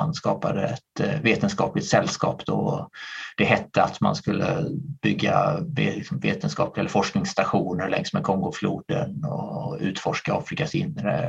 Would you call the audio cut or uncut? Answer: uncut